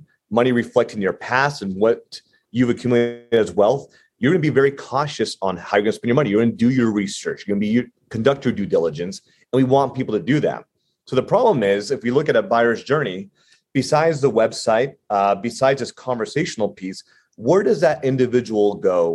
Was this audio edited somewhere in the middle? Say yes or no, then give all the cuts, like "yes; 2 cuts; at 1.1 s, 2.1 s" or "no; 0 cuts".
no; 0 cuts